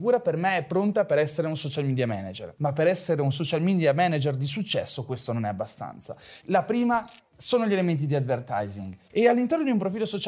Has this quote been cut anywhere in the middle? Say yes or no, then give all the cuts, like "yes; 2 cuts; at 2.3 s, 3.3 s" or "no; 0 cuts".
yes; 2 cuts; at 6.4 s, 9.1 s